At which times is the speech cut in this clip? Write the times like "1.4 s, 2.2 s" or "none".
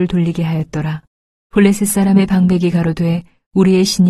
1.4 s